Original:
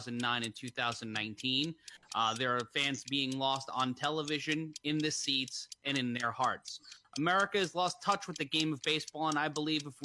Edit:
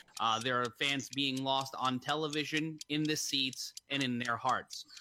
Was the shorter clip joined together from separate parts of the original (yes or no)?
no